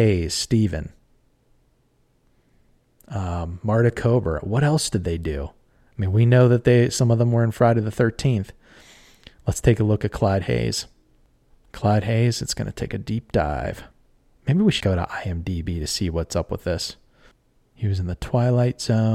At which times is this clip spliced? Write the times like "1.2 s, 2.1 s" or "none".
14.8 s